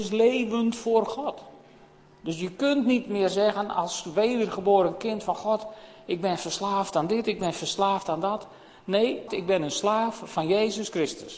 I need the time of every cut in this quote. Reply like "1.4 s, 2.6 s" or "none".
9.3 s